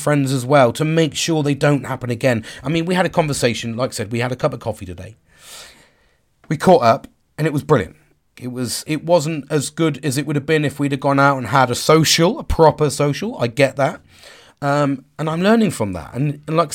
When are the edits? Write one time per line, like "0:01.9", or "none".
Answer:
0:08.4